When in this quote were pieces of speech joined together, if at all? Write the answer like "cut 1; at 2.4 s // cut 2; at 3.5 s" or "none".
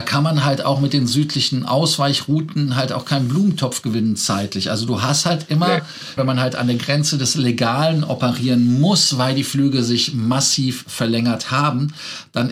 cut 1; at 6.2 s